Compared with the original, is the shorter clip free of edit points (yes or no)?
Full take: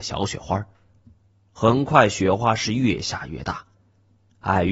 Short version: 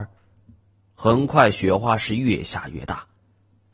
yes